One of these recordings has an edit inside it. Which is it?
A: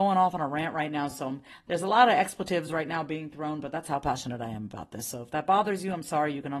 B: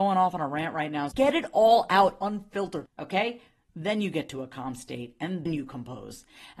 B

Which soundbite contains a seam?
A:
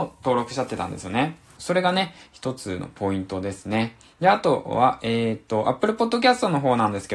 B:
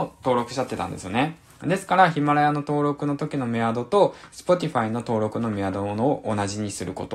A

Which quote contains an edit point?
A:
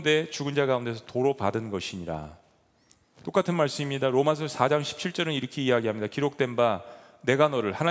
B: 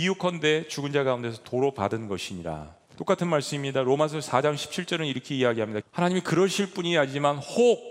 B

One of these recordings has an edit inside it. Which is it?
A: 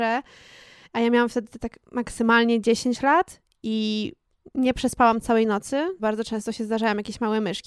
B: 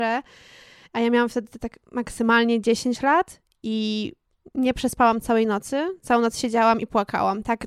A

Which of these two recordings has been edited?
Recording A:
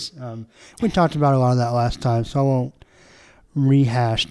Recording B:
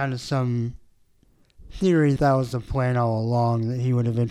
B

